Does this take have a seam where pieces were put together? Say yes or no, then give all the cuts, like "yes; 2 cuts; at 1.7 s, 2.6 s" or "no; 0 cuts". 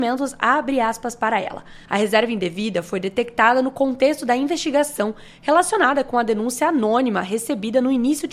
yes; 1 cut; at 1.9 s